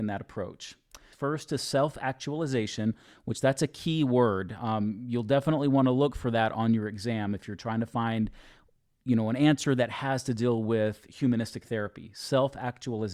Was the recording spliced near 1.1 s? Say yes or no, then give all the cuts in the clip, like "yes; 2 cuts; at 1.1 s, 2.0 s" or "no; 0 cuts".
yes; 1 cut; at 1.1 s